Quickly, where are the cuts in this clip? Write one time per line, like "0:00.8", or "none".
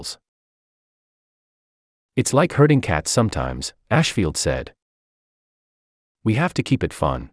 none